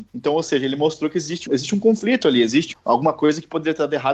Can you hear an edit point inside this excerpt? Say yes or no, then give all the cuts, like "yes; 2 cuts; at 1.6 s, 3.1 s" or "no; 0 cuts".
yes; 2 cuts; at 1.5 s, 2.7 s